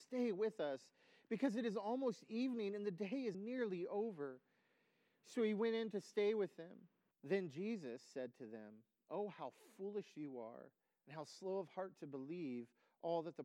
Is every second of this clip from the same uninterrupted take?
no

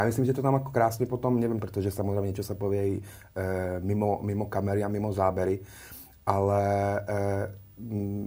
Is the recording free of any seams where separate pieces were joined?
no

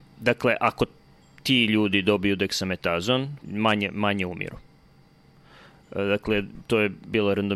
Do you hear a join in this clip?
yes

